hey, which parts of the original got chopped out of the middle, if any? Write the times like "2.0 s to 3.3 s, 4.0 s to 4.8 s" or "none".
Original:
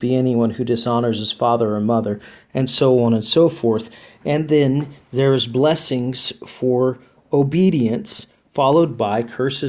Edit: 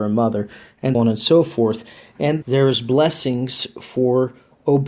2.7 s to 3.0 s, 4.5 s to 5.1 s